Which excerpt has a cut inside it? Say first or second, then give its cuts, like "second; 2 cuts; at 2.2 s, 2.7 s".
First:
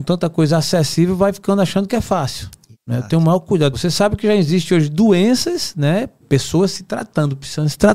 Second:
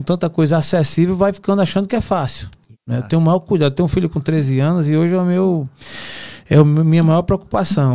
first; 2 cuts; at 3.7 s, 6.2 s